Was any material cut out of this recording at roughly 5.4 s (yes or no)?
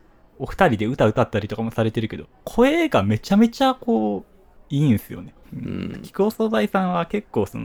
yes